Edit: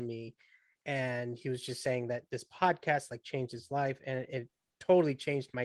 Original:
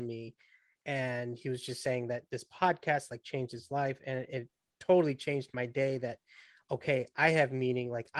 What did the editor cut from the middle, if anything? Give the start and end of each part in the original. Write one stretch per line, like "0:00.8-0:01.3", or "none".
none